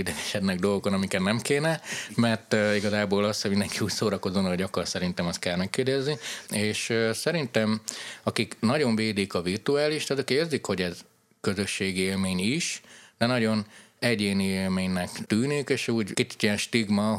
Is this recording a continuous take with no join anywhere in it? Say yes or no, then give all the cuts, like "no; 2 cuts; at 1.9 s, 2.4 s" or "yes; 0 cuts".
no; 1 cut; at 6.4 s